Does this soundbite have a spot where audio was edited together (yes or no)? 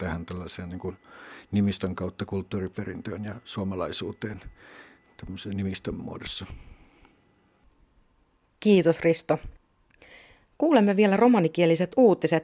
no